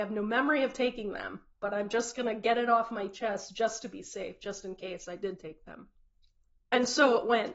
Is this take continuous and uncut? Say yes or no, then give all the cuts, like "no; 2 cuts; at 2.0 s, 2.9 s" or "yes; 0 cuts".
yes; 0 cuts